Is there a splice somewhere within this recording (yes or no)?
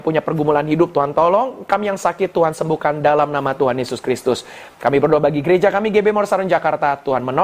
no